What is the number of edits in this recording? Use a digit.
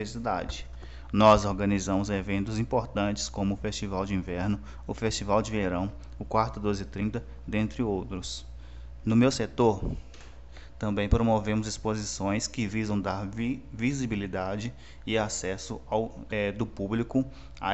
1